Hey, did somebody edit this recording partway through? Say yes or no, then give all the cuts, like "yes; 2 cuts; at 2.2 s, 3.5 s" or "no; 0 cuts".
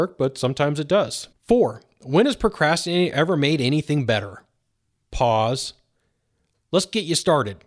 no; 0 cuts